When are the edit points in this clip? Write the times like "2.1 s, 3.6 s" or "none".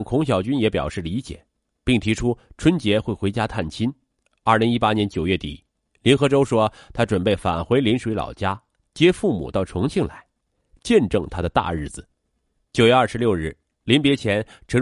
4.2 s, 12.6 s